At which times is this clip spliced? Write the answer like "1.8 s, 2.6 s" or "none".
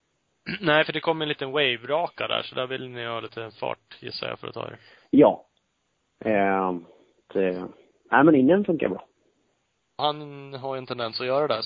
7.3 s, 10.0 s